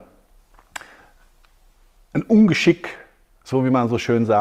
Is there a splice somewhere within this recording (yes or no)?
no